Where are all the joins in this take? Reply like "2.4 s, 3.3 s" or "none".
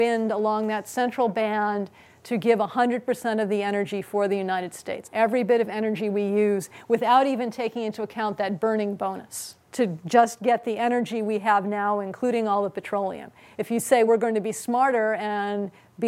5.0 s, 9.6 s, 14.1 s